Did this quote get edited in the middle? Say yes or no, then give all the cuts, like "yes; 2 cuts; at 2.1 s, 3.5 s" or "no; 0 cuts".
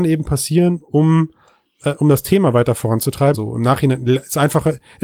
yes; 1 cut; at 3.3 s